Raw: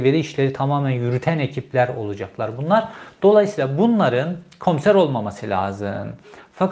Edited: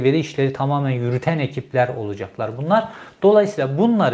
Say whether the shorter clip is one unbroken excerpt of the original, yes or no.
yes